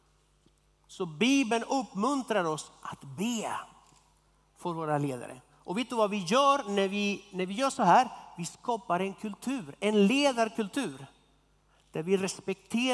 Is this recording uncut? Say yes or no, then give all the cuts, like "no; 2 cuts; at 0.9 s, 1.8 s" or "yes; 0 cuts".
yes; 0 cuts